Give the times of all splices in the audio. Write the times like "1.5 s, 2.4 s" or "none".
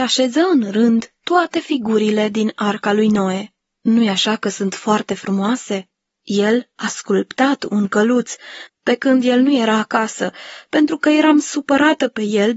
3.8 s, 6.2 s, 8.7 s